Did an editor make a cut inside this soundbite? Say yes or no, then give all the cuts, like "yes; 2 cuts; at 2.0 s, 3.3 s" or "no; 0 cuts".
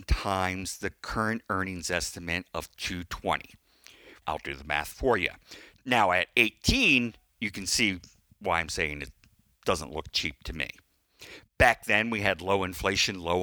yes; 2 cuts; at 4.2 s, 5.8 s